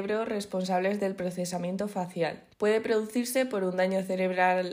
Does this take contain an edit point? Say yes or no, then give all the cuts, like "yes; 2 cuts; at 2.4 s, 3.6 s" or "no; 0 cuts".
yes; 1 cut; at 2.5 s